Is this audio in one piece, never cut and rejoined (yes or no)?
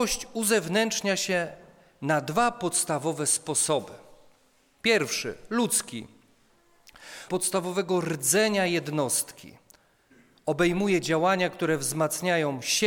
no